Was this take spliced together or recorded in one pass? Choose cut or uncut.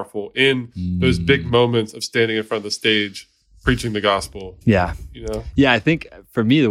cut